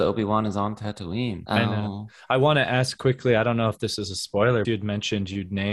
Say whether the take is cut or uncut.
cut